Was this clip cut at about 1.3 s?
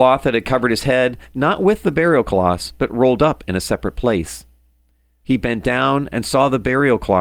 no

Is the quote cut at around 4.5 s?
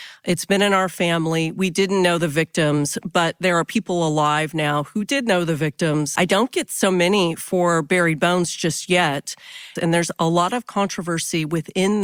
no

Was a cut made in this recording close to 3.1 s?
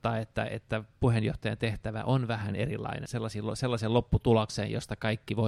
yes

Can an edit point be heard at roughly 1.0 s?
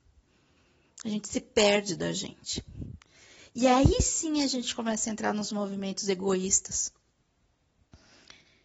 no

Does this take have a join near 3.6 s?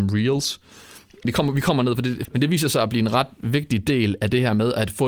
no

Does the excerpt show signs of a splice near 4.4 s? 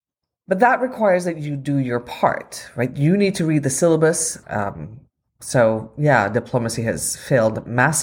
yes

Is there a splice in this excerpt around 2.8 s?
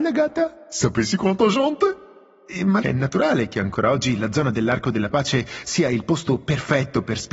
yes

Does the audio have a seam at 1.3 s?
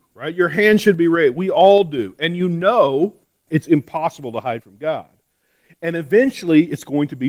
no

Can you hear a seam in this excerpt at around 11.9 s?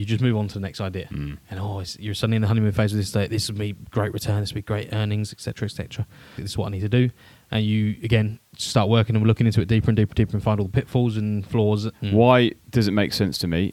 yes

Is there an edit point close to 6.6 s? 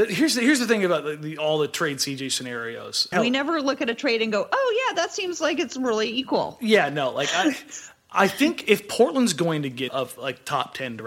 no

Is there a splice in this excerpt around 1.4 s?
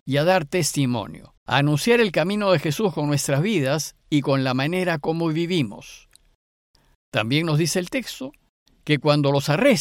yes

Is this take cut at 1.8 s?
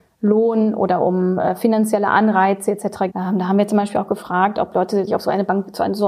no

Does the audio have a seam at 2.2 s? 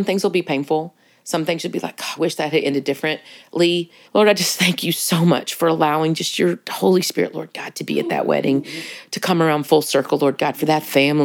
yes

